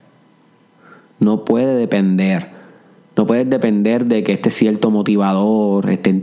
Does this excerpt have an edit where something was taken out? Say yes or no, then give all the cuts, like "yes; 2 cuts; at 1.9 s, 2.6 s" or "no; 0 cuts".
no; 0 cuts